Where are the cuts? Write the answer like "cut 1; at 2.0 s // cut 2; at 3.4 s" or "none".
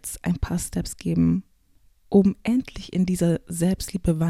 none